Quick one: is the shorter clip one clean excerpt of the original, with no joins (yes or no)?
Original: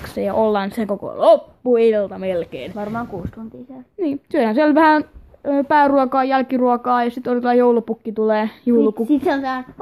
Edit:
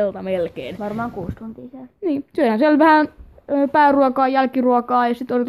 yes